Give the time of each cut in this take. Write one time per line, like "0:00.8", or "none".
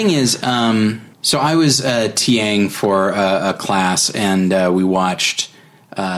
0:01.1